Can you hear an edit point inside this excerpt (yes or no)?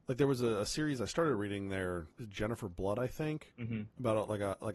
no